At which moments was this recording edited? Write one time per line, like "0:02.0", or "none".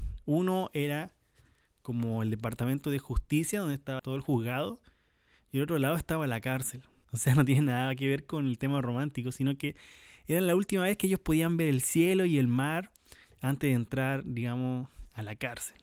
0:04.0
0:07.0